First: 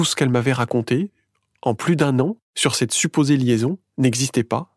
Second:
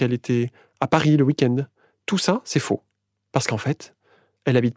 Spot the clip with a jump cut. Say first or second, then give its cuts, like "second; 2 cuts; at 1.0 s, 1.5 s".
second; 1 cut; at 3.3 s